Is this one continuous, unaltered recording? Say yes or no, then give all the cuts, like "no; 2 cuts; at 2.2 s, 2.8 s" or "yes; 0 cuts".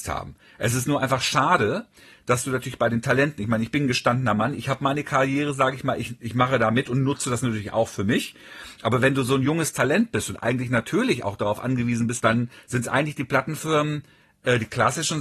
no; 1 cut; at 12.2 s